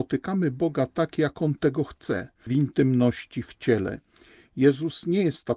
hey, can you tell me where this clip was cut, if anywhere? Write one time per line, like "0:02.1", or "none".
0:02.5